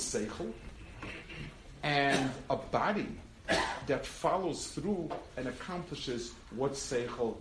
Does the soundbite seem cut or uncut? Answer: uncut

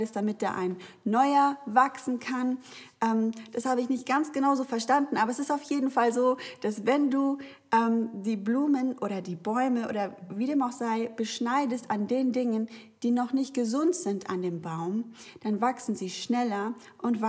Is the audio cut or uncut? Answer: uncut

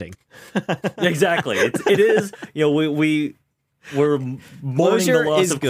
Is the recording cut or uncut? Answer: uncut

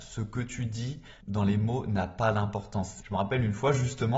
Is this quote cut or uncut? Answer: cut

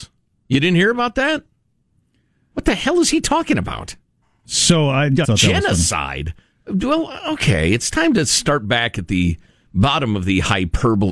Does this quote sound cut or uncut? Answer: cut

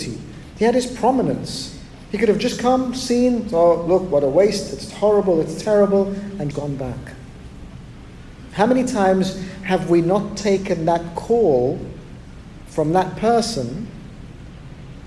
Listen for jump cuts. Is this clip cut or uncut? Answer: cut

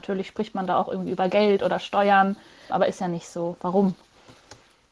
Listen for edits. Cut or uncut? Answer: cut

